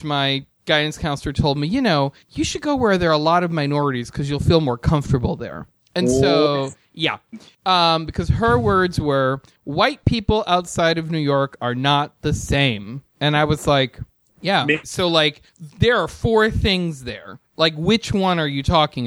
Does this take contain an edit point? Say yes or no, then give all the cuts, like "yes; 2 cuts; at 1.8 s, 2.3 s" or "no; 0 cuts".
yes; 1 cut; at 14.8 s